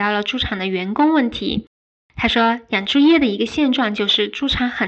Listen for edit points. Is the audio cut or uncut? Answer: uncut